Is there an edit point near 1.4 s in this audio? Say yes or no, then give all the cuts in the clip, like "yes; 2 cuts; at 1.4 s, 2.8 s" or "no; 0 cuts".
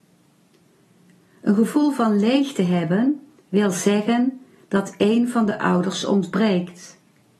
no; 0 cuts